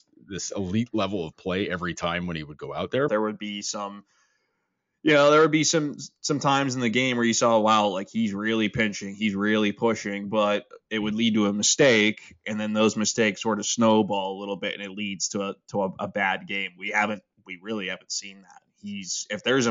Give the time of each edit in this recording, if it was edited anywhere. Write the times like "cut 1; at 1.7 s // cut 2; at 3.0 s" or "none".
cut 1; at 3.1 s